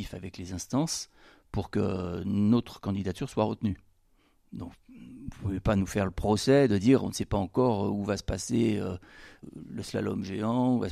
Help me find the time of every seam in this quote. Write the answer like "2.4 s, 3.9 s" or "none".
none